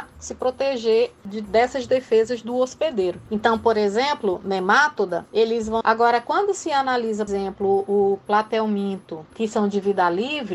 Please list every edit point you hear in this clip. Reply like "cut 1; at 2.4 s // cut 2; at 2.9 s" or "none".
cut 1; at 5.8 s // cut 2; at 7.3 s